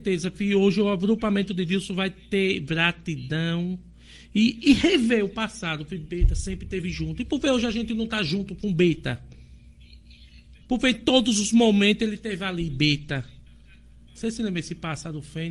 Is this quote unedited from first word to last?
no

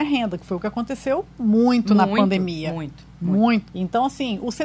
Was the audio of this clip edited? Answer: yes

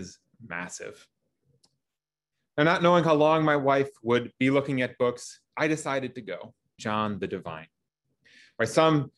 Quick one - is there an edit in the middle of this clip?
yes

